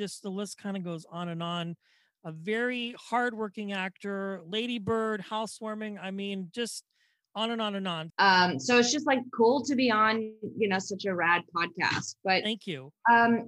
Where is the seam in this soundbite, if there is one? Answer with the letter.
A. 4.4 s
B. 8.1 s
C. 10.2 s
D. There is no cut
B